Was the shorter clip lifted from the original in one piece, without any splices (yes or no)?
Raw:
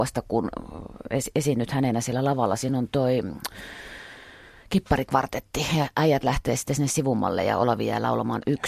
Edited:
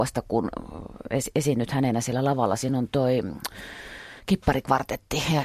no